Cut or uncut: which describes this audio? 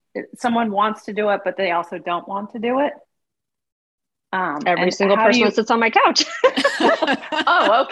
uncut